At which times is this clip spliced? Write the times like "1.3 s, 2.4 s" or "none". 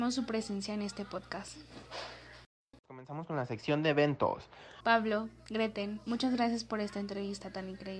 2.7 s, 4.8 s